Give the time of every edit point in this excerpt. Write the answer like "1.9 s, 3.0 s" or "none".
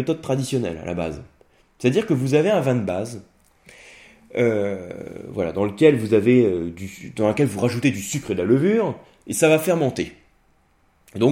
none